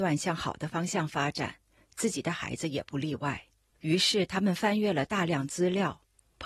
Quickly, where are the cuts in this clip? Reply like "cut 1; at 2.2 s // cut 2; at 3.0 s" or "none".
none